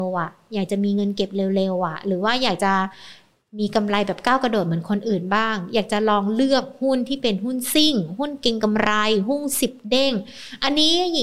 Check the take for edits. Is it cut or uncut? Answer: uncut